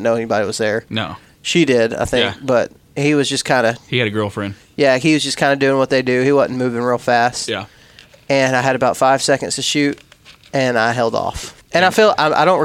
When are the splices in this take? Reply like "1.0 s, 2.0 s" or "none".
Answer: 11.6 s